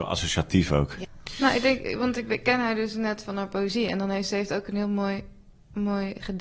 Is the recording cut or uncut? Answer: uncut